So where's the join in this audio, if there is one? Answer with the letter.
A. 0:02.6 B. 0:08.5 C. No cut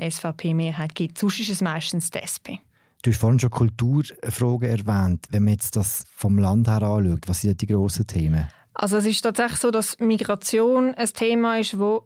C